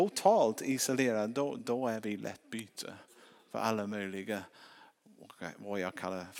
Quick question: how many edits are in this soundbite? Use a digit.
1